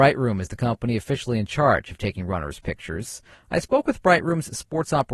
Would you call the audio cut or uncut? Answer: uncut